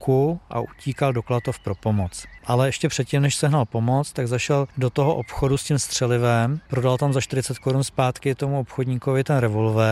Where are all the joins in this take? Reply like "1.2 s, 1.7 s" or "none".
none